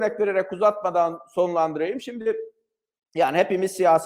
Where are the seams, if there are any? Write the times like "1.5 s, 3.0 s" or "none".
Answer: none